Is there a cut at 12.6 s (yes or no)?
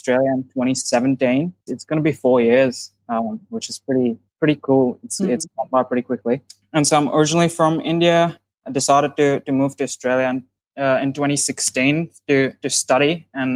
no